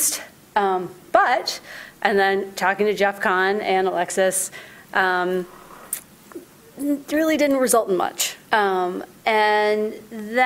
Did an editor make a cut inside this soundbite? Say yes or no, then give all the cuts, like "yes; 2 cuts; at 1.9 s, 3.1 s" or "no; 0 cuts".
yes; 1 cut; at 8.4 s